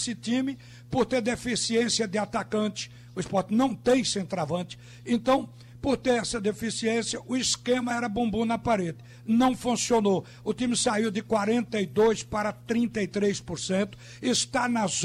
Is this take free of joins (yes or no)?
yes